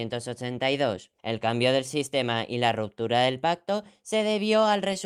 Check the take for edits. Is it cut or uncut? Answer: cut